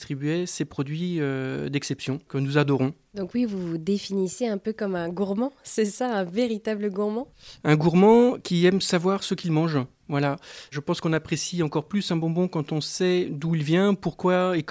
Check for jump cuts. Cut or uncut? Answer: uncut